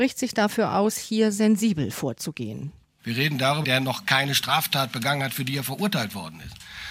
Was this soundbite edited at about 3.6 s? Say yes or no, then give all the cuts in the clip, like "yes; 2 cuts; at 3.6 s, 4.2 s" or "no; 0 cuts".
yes; 1 cut; at 3.6 s